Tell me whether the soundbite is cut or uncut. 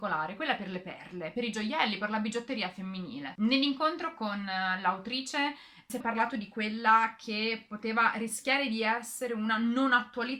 cut